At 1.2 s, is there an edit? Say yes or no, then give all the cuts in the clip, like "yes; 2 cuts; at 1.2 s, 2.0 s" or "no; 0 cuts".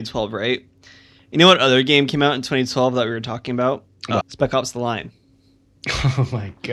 no; 1 cut; at 4.2 s